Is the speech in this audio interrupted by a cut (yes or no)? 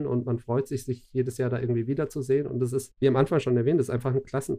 no